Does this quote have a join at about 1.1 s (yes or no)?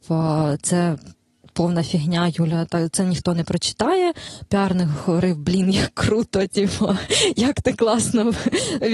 no